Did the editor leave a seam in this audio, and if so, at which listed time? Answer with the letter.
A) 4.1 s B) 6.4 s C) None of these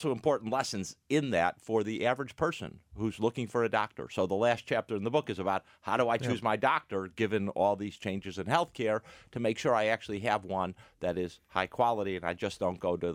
C